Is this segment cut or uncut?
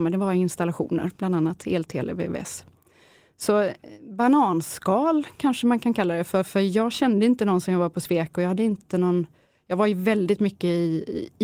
uncut